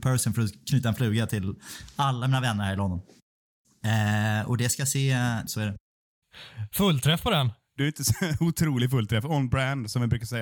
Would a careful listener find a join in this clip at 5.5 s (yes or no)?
yes